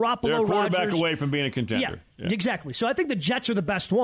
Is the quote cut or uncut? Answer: uncut